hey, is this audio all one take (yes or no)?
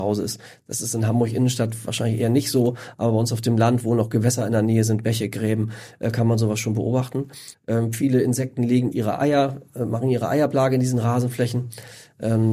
no